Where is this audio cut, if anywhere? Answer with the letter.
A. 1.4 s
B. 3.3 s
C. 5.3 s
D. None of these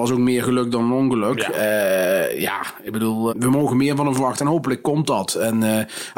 B